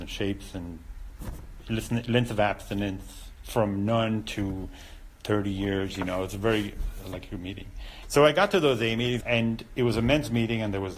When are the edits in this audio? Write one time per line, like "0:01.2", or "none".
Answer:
0:08.0
0:09.2